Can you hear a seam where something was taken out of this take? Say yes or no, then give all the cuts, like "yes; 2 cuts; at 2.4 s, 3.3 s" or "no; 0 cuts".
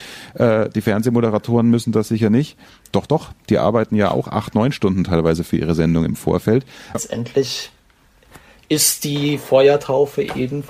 yes; 1 cut; at 6.9 s